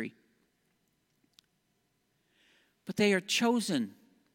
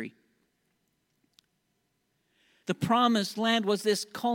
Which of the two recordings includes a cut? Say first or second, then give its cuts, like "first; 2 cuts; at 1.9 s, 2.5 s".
second; 1 cut; at 2.6 s